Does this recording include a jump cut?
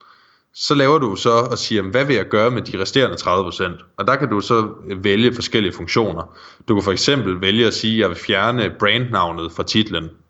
no; 0 cuts

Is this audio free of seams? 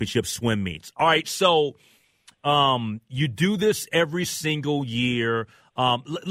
yes; 0 cuts

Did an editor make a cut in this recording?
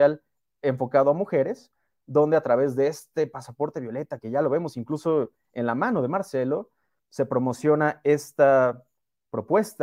no; 0 cuts

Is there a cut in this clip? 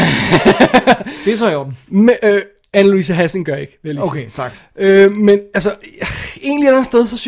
no; 0 cuts

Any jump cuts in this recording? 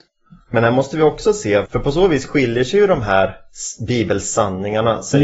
yes; 1 cut; at 1.7 s

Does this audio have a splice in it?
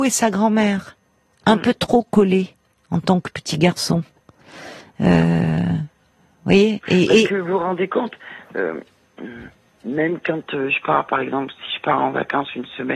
no; 0 cuts

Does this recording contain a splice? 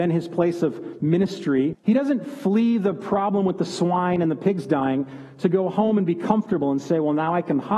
yes; 1 cut; at 1.7 s

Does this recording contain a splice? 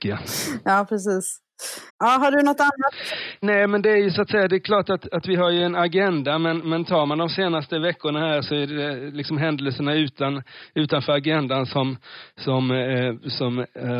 yes; 1 cut; at 1.9 s

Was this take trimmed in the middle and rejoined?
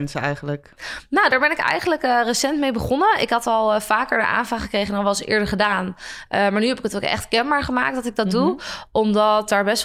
no; 0 cuts

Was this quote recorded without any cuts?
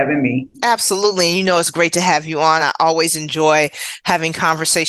yes; 0 cuts

